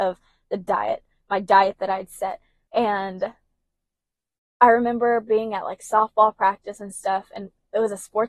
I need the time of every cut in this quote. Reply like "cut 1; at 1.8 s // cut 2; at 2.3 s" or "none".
cut 1; at 2.7 s